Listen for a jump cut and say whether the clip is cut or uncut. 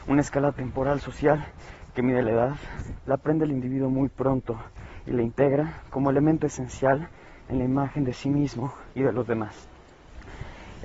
cut